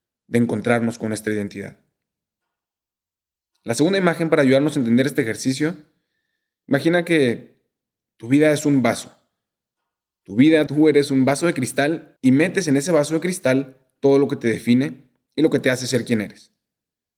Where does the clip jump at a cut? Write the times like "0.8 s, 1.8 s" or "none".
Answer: 10.7 s, 12.2 s